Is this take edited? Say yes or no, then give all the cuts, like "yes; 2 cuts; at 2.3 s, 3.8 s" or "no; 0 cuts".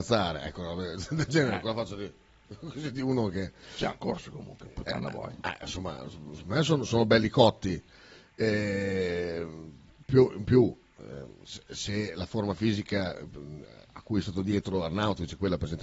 no; 0 cuts